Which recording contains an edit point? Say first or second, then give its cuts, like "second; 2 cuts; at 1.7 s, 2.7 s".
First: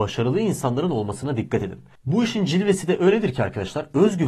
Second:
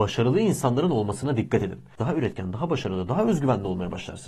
second; 1 cut; at 2.0 s